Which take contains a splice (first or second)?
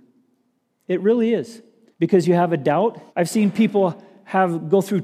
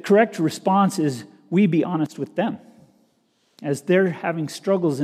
first